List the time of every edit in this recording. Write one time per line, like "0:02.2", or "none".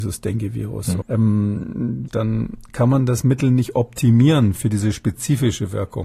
0:01.0
0:02.1